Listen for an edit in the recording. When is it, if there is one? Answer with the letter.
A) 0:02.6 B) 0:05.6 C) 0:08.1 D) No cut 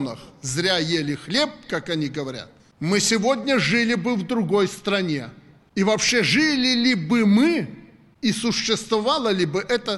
A